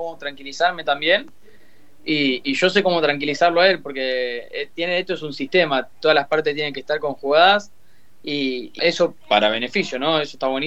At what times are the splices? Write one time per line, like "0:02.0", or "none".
0:08.8